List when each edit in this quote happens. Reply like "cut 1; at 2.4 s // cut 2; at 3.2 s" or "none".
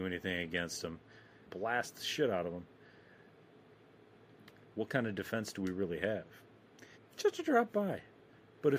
cut 1; at 1.5 s // cut 2; at 6.9 s